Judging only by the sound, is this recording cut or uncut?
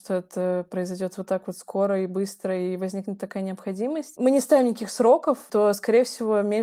cut